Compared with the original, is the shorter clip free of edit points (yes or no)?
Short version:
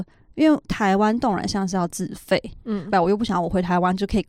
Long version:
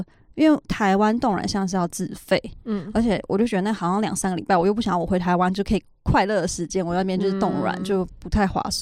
no